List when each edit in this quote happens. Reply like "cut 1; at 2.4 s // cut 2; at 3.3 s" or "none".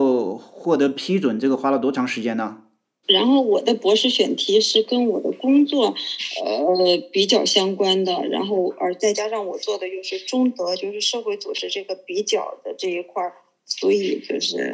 cut 1; at 3.0 s